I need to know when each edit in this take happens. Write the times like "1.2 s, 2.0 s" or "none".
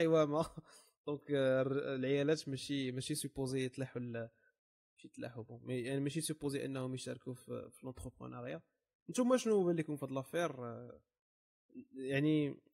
none